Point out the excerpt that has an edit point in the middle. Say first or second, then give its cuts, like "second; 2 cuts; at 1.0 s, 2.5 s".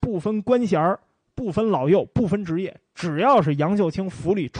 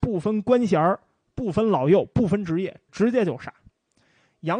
second; 1 cut; at 2.9 s